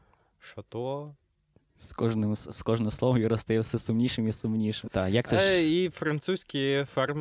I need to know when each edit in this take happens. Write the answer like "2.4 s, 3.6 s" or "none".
4.9 s